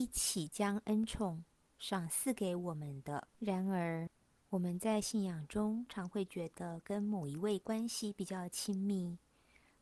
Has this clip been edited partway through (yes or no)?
yes